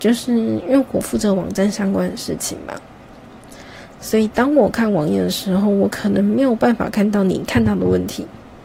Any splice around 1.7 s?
no; 1 cut; at 3.9 s

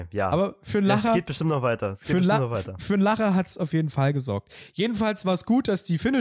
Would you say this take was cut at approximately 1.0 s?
no; 0 cuts

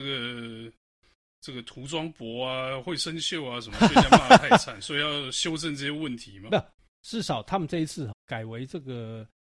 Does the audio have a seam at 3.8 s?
no; 2 cuts; at 7.0 s, 8.1 s

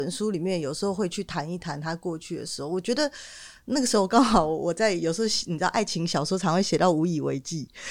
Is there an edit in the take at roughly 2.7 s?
no; 0 cuts

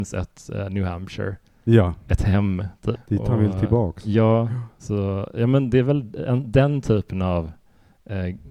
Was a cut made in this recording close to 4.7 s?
no; 1 cut; at 2.9 s

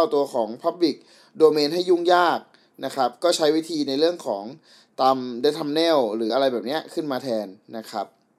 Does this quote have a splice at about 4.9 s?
no; 1 cut; at 6.3 s

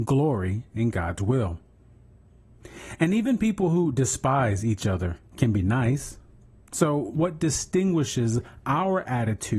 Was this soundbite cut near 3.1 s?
no; 0 cuts

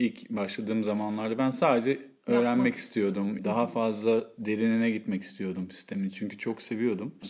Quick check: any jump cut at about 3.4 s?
yes; 1 cut; at 3.4 s

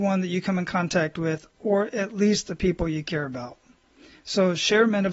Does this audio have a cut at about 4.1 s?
no; 0 cuts

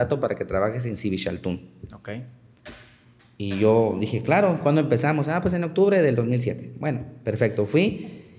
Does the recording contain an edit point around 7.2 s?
no; 0 cuts

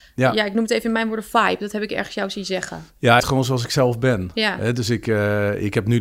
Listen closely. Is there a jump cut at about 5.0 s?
no; 1 cut; at 3.2 s

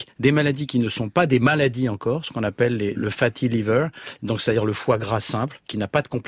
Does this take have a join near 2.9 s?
yes; 1 cut; at 2.9 s

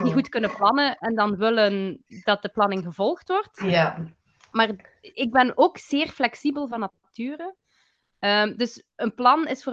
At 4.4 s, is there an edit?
no; 0 cuts

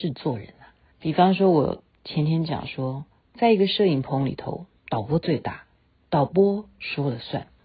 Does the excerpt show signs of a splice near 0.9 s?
yes; 1 cut; at 0.9 s

